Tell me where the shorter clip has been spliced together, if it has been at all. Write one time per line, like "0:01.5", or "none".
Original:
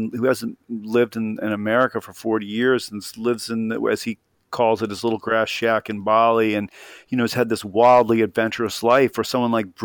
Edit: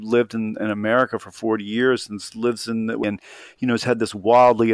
0:03.0

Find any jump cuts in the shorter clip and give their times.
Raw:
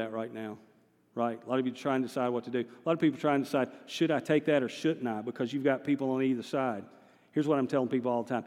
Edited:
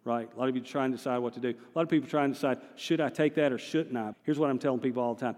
0:04.1

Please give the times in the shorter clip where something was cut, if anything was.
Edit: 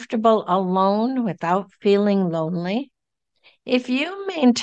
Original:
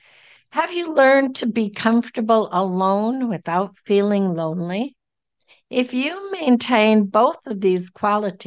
none

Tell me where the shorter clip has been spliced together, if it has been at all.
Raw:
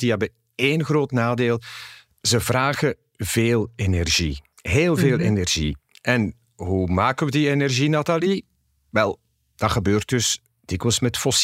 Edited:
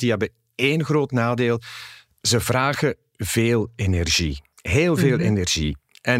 none

